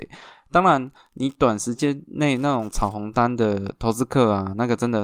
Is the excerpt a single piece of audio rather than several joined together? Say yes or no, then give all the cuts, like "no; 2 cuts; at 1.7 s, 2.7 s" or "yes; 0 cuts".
yes; 0 cuts